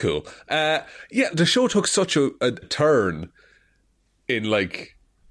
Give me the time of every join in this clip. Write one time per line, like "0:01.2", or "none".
0:01.3
0:02.6